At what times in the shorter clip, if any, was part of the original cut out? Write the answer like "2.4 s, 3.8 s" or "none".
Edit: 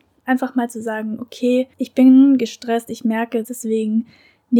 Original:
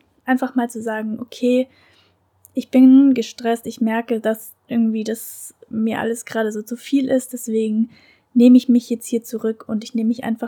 1.7 s, 3.4 s